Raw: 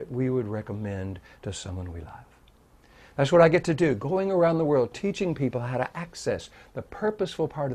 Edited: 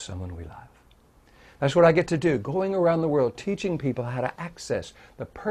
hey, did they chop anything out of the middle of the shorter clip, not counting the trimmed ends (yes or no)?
no